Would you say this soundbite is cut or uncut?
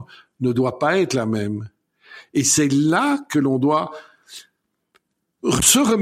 uncut